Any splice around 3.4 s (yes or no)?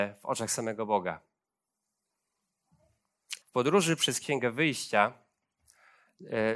yes